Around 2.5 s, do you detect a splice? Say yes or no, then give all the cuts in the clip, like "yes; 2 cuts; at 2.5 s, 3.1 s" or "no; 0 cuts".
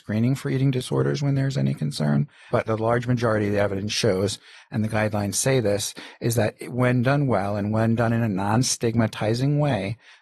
yes; 1 cut; at 2.5 s